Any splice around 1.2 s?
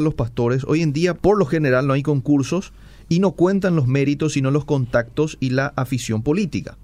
yes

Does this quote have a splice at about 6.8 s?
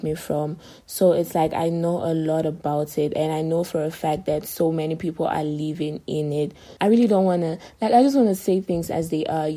yes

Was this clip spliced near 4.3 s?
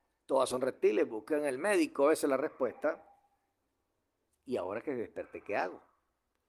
yes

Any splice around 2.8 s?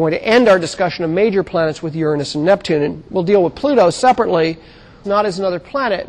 no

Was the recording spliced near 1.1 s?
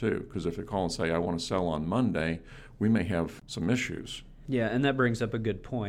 no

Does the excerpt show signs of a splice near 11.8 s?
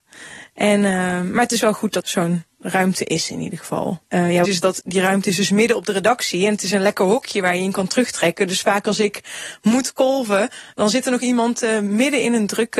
no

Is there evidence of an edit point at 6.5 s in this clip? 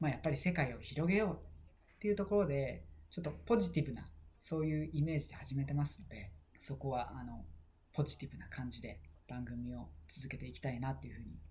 yes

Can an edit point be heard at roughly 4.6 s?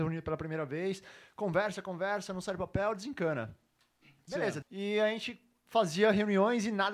yes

